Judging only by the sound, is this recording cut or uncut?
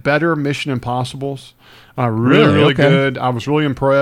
uncut